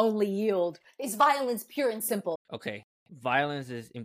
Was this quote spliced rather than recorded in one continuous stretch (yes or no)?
yes